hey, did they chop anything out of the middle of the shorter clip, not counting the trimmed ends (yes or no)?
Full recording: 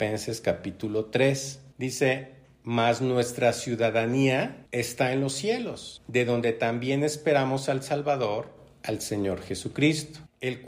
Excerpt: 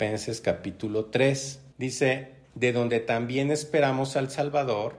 yes